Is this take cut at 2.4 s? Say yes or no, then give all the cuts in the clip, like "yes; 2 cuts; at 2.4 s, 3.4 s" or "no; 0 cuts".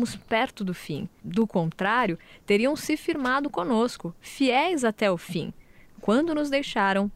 no; 1 cut; at 1.2 s